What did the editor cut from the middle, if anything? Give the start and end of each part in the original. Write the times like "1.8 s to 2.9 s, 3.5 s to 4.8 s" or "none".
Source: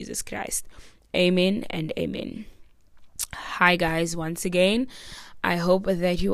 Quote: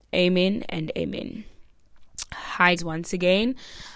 3.8 s to 4.1 s